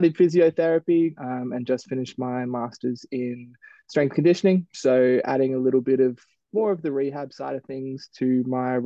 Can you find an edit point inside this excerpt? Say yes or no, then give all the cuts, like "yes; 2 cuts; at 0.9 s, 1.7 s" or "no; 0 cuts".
yes; 1 cut; at 1.1 s